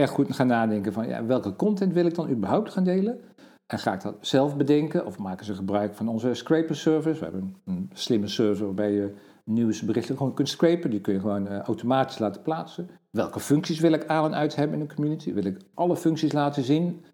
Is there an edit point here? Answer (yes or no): no